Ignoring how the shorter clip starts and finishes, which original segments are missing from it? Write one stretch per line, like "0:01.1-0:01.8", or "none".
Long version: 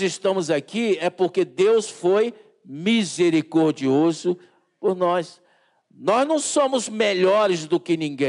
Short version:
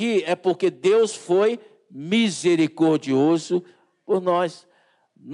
none